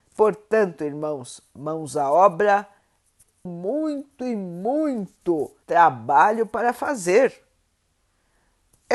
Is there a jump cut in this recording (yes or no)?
yes